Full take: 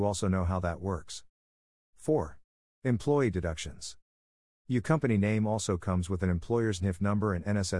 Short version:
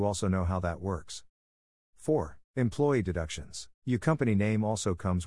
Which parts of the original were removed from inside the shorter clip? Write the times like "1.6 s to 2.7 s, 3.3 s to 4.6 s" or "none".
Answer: 2.5 s to 2.7 s, 4.0 s to 4.6 s